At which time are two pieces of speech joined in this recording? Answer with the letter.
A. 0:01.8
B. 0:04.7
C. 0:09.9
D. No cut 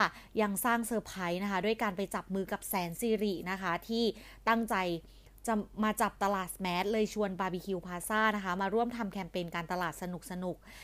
D